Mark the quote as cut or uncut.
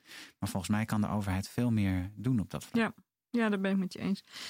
uncut